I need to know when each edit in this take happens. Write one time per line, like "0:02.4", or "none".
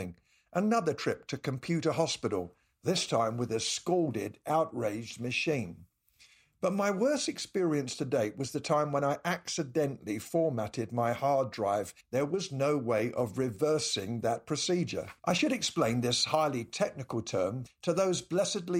0:12.0
0:15.2
0:17.7

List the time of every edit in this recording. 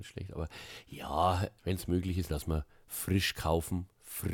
0:02.3

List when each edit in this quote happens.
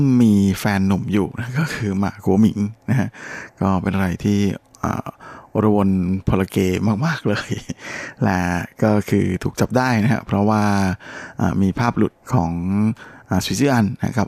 0:12.2

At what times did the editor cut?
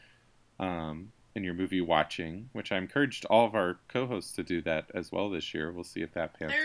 none

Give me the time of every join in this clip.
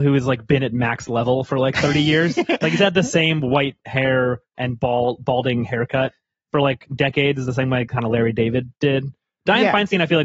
none

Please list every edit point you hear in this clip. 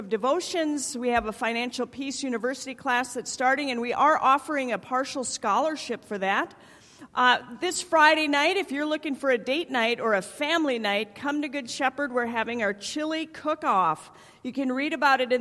0:07.1

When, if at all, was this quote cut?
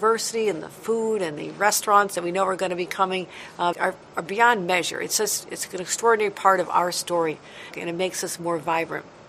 0:03.7
0:07.7

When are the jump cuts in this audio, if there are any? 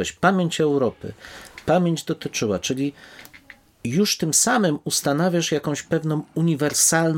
none

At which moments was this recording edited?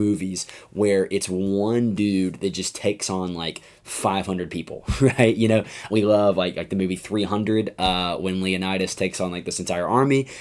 0:05.9

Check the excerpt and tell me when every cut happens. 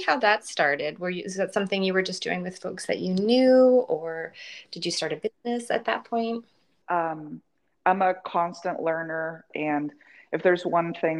0:06.8
0:09.5

